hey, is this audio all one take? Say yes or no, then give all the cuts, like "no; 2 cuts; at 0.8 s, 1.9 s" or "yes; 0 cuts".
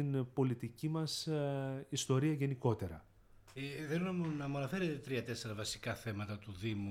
no; 1 cut; at 3.5 s